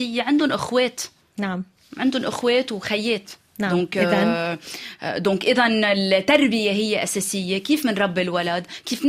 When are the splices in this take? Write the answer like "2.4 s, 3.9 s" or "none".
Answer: none